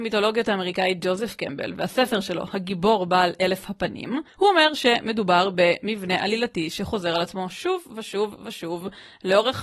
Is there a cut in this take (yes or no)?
yes